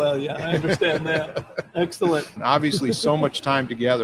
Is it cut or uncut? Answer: cut